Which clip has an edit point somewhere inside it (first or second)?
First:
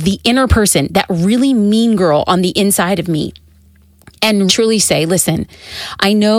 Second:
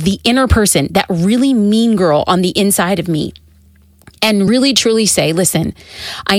first